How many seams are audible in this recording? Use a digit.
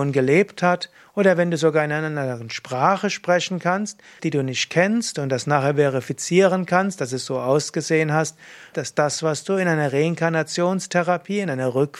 2